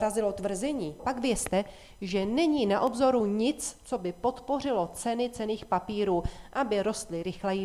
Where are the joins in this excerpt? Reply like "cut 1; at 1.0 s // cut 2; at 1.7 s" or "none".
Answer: cut 1; at 1.0 s